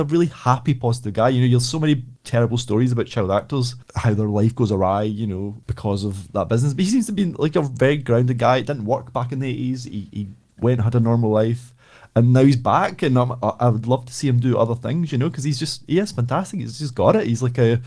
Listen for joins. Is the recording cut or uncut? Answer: uncut